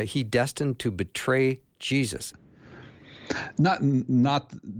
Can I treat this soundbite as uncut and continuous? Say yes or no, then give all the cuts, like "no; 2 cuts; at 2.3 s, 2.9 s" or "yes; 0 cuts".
no; 1 cut; at 2.3 s